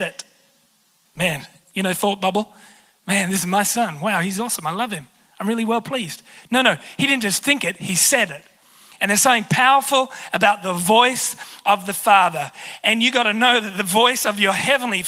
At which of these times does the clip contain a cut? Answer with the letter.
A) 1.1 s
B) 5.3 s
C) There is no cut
A